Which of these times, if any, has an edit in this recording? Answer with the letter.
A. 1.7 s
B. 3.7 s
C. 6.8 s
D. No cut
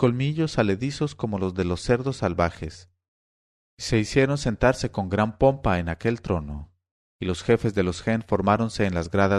B